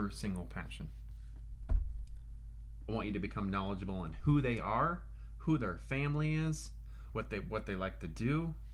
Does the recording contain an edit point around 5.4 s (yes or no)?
no